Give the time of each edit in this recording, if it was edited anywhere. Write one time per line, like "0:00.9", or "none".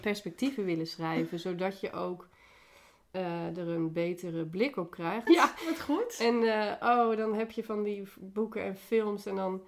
0:05.3